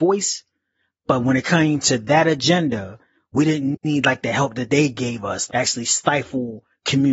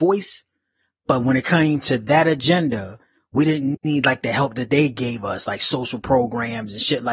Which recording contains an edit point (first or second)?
first